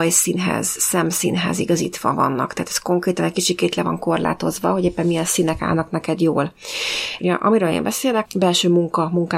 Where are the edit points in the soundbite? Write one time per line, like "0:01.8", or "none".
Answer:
0:07.2
0:08.3

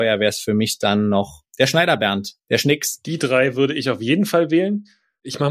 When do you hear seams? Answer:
none

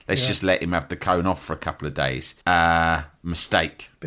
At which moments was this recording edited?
0:02.4

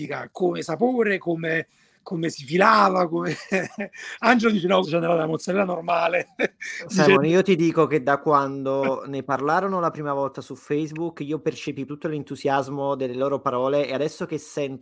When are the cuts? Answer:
0:04.8
0:11.9

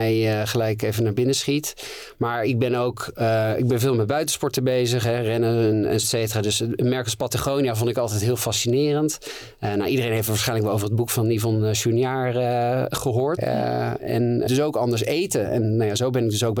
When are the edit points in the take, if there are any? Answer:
0:06.0
0:13.4
0:14.5

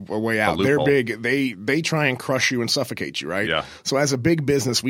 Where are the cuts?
none

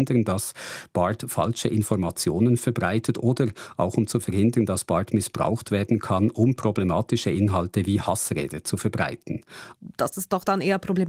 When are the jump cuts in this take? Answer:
0:09.7

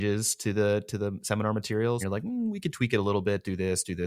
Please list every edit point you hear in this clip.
0:02.0

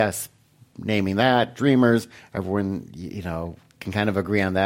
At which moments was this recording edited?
none

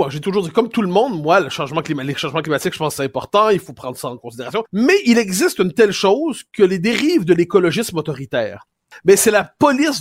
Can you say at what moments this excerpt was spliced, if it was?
0:04.7
0:08.9

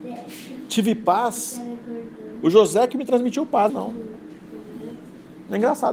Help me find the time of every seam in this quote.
0:03.7

